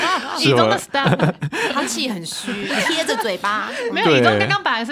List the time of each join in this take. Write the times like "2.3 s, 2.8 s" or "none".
1.0 s, 2.7 s